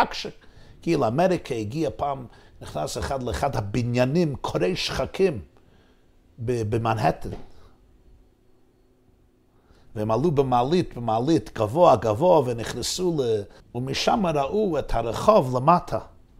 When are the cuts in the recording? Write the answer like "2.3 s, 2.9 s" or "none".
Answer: 13.6 s